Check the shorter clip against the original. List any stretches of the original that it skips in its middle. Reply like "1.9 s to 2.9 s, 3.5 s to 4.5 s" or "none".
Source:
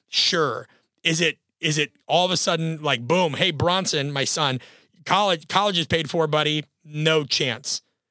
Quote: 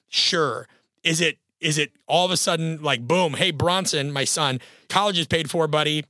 4.9 s to 5.5 s